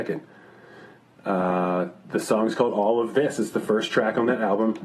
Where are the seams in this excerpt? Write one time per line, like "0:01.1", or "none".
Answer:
none